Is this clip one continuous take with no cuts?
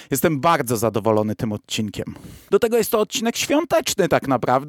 no; 1 cut; at 2.5 s

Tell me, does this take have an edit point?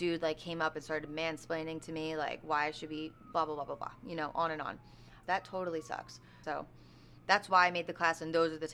yes; 2 cuts; at 5.2 s, 6.4 s

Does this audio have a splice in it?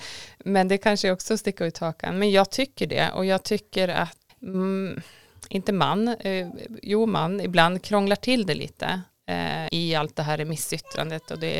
yes; 2 cuts; at 4.3 s, 9.7 s

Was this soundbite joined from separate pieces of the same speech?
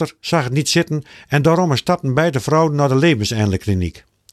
no; 0 cuts

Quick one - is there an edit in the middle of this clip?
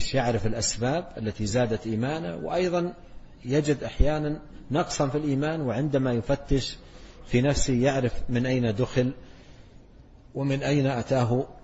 no; 0 cuts

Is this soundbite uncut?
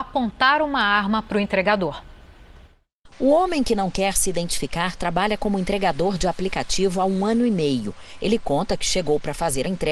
yes; 0 cuts

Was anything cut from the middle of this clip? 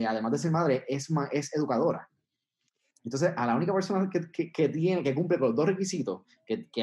no; 0 cuts

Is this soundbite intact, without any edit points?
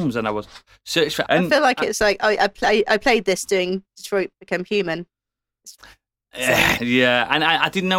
no; 2 cuts; at 1.3 s, 6.8 s

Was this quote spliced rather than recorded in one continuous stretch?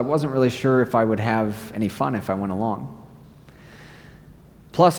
no; 0 cuts

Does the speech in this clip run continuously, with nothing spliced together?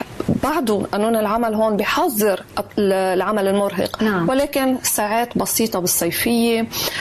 yes; 0 cuts

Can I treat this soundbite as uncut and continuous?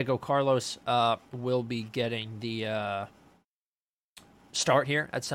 yes; 0 cuts

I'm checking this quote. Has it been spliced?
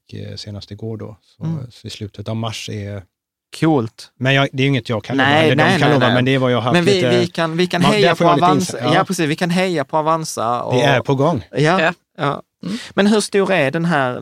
no; 0 cuts

